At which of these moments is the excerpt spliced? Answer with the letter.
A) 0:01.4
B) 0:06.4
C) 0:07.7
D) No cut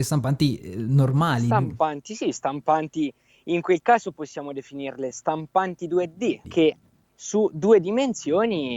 B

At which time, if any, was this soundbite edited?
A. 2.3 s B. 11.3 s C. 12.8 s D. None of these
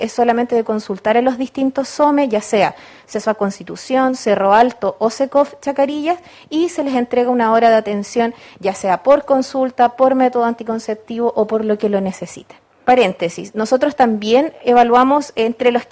C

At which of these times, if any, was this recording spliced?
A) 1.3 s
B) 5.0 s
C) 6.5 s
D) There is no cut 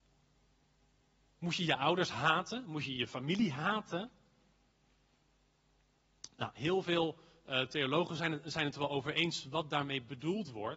D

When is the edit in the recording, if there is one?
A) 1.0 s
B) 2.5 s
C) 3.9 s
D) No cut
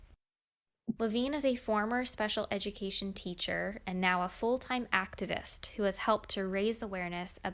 A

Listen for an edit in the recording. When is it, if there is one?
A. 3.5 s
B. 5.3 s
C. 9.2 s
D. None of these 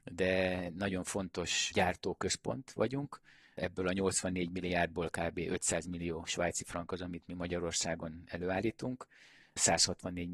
D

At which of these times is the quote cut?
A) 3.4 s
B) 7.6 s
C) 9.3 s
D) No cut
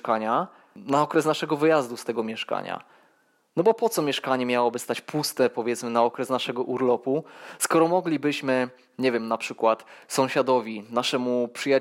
D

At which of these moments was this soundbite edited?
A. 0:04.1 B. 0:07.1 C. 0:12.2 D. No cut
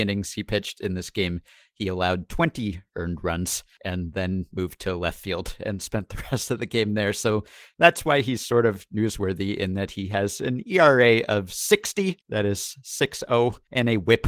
C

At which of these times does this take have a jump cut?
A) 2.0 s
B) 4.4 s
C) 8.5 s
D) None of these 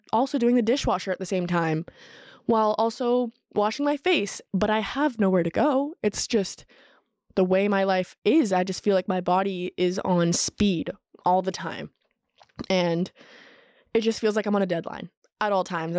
B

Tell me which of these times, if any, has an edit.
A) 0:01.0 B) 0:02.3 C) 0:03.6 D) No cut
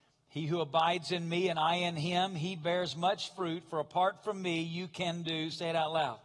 D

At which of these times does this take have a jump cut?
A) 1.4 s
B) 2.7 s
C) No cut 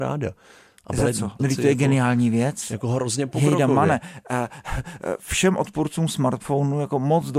A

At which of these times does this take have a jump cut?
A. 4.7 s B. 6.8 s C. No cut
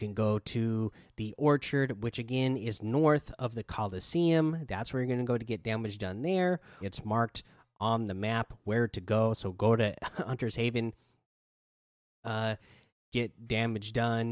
B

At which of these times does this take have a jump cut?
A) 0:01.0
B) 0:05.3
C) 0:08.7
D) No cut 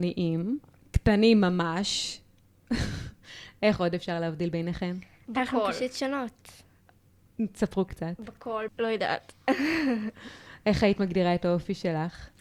C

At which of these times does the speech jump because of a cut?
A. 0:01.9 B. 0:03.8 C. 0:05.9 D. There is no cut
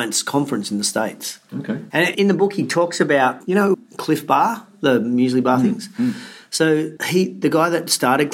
A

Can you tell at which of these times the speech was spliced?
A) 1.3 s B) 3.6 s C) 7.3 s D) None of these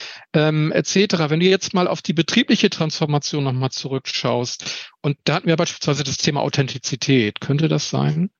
C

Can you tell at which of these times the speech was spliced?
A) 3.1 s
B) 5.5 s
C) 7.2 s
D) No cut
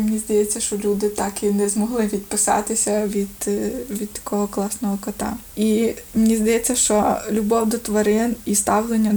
B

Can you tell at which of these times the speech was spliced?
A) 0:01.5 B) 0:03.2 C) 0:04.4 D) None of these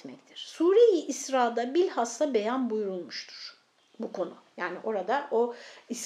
D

